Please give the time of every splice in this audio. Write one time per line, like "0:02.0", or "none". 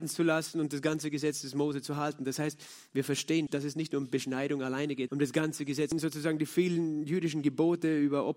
0:03.5
0:05.1